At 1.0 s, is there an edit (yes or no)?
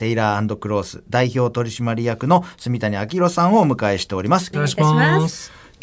no